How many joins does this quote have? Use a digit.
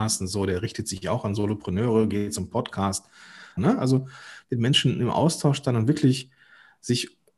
1